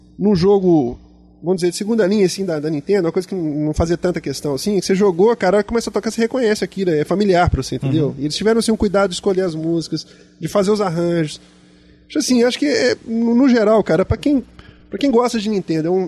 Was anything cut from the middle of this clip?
no; 0 cuts

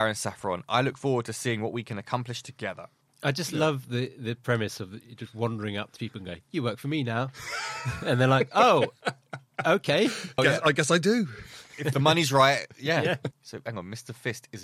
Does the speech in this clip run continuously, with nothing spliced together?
no; 2 cuts; at 10.4 s, 13.3 s

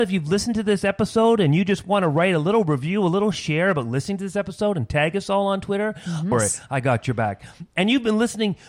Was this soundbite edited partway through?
yes; 1 cut; at 6.3 s

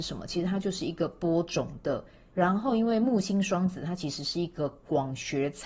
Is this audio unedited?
no; 1 cut; at 2.3 s

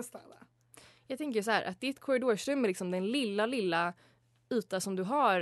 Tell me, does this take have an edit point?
no; 0 cuts

